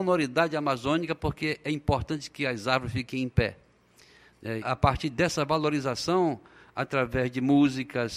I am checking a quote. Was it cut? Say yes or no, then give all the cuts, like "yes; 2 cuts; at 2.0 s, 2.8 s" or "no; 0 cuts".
yes; 1 cut; at 4.6 s